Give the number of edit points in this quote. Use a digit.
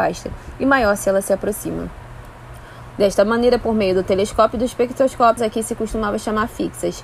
2